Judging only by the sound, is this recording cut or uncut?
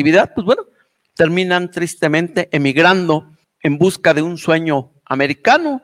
cut